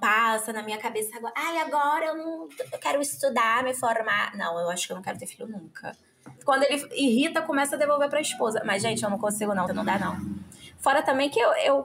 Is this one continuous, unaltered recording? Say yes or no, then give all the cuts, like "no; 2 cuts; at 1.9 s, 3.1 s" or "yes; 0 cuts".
no; 2 cuts; at 6.4 s, 9.7 s